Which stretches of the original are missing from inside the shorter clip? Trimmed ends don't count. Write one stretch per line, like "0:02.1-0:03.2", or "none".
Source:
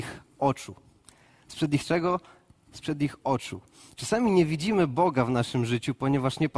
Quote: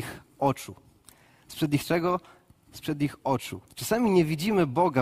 0:03.7-0:03.9